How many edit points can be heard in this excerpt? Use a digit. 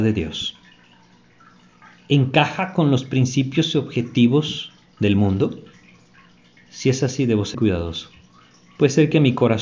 1